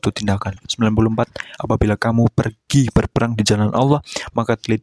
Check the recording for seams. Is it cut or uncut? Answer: cut